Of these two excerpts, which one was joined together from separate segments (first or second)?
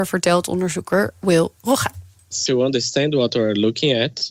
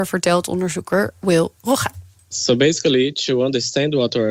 first